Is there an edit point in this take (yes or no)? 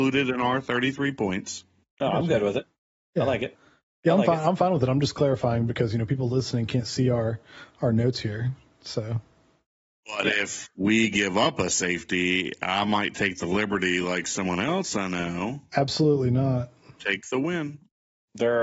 no